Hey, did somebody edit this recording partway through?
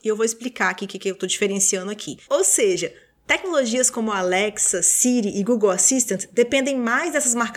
yes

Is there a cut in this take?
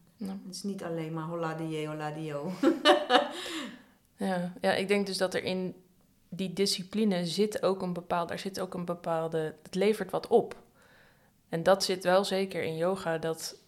no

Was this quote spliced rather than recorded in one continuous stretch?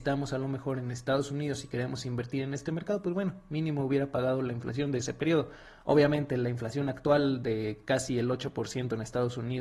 no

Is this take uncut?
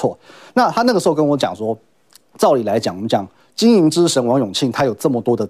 yes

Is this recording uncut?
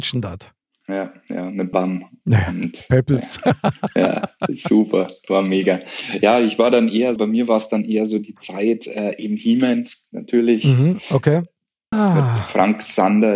no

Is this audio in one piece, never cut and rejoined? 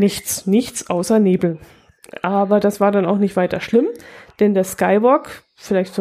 yes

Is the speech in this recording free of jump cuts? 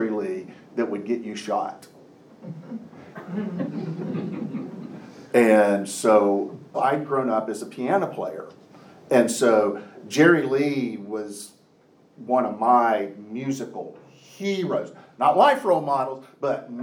no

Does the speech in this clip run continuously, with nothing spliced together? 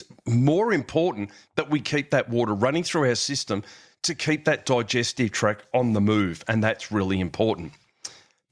yes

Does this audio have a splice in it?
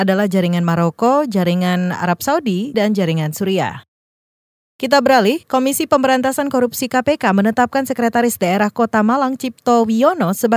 yes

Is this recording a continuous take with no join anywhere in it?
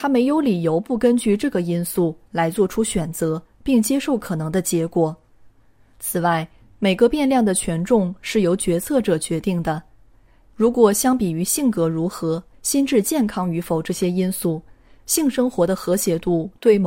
no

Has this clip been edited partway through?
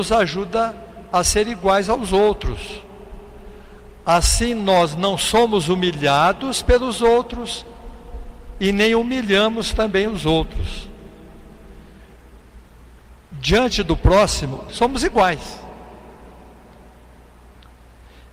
yes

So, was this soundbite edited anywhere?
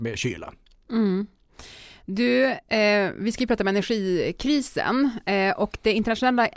no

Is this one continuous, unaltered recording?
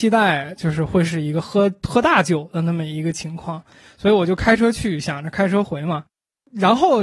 yes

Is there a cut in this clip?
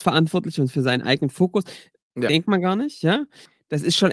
yes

